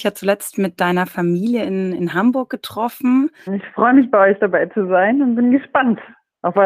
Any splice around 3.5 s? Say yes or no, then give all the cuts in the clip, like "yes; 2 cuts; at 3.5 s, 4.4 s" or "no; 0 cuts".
yes; 1 cut; at 3.5 s